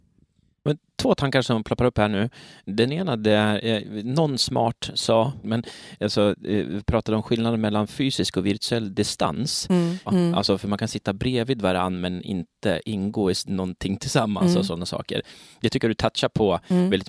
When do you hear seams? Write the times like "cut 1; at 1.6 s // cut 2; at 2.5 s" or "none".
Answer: cut 1; at 5.4 s // cut 2; at 10.1 s